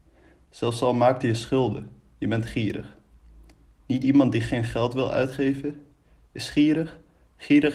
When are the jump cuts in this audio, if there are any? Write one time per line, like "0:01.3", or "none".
none